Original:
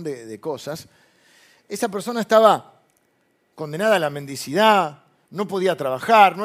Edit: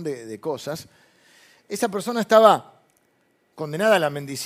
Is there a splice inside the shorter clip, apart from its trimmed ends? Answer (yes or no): no